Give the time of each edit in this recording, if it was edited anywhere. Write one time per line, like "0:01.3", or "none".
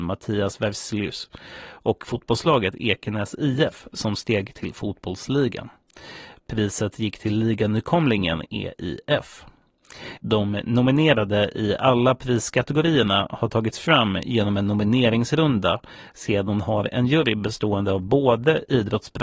0:10.2